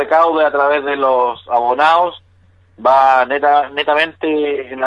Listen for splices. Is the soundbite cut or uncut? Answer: uncut